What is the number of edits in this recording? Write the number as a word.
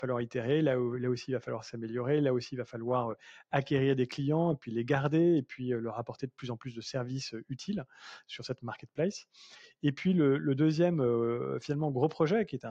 zero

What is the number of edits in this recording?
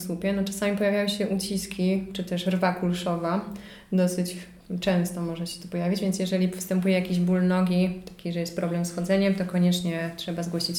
zero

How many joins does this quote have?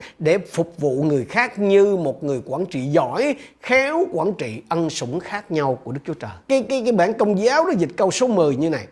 one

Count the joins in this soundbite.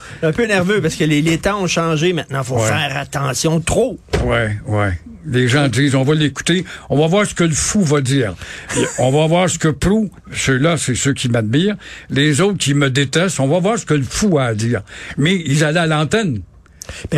zero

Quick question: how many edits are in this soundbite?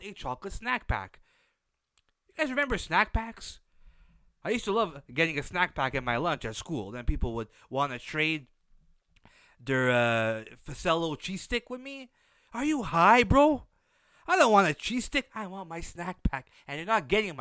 zero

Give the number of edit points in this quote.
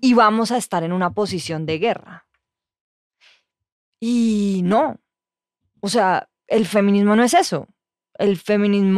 zero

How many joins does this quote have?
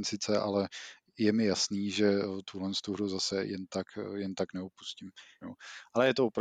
one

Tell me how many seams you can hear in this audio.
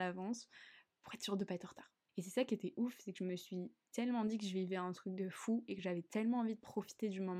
one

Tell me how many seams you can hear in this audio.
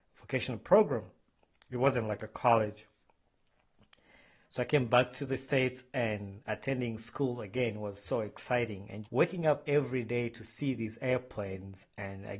one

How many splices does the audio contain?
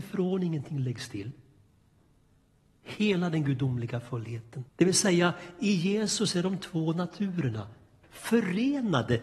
three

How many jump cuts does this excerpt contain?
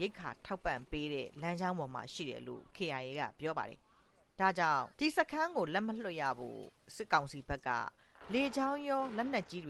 one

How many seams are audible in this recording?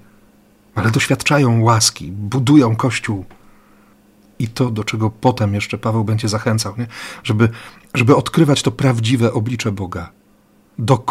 zero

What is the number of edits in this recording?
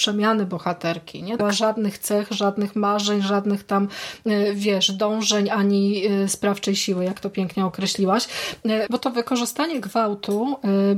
two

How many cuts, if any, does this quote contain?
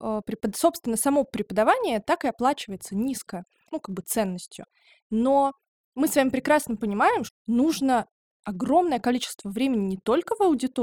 two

